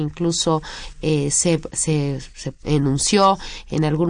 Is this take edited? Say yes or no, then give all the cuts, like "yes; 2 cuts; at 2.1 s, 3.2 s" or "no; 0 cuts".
yes; 1 cut; at 2.6 s